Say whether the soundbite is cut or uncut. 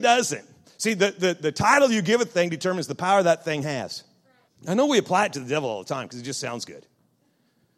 cut